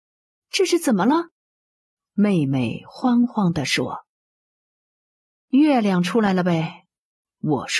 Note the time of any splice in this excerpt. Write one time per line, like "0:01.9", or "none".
none